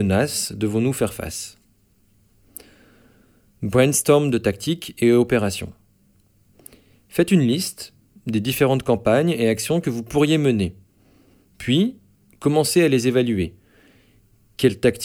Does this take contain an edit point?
no; 0 cuts

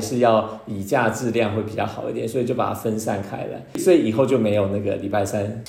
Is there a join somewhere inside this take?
no; 0 cuts

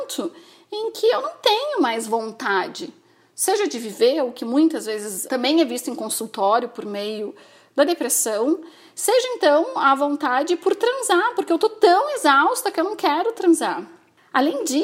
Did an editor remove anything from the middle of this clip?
yes; 1 cut; at 5.3 s

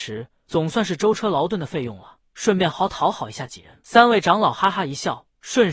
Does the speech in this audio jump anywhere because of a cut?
yes; 1 cut; at 2.7 s

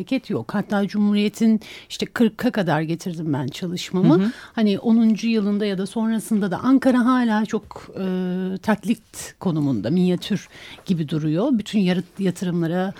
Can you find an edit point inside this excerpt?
no; 0 cuts

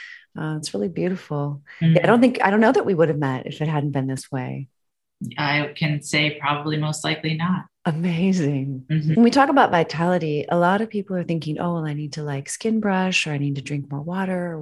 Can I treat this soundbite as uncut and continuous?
no; 1 cut; at 9.1 s

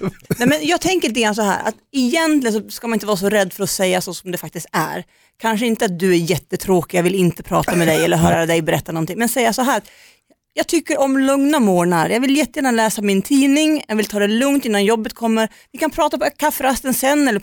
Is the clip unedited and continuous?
yes; 0 cuts

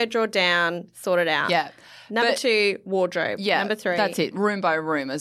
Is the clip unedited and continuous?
yes; 0 cuts

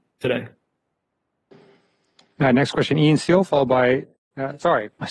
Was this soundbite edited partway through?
no; 0 cuts

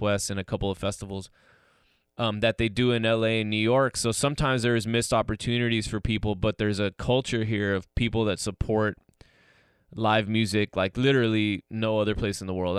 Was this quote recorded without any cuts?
yes; 0 cuts

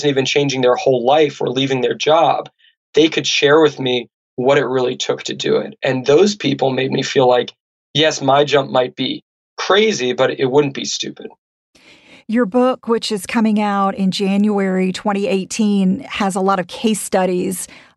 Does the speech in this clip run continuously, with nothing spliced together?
yes; 0 cuts

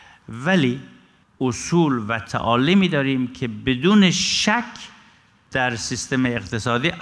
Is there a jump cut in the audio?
no; 0 cuts

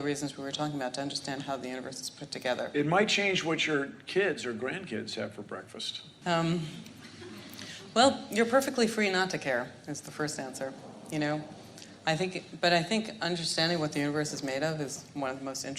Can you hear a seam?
yes; 1 cut; at 6.2 s

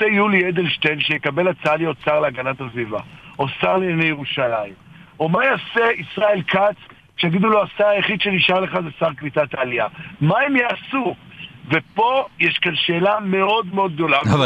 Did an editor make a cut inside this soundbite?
no; 0 cuts

